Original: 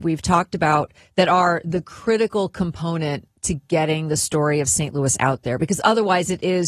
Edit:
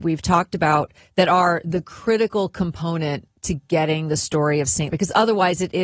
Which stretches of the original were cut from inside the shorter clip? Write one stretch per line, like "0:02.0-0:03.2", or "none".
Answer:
0:04.9-0:05.6